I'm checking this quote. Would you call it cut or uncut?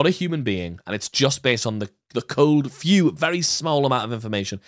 uncut